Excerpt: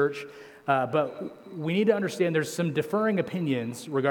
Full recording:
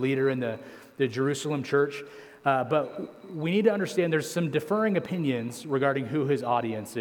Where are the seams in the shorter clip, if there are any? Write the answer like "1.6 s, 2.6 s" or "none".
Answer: none